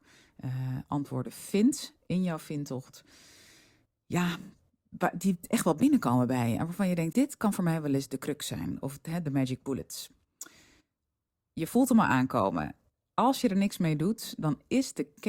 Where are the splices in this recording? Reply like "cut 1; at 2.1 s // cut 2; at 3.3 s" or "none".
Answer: cut 1; at 7.1 s